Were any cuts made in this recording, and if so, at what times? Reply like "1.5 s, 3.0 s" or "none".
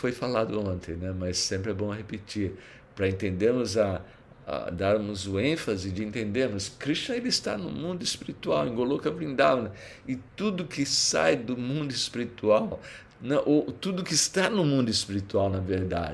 13.1 s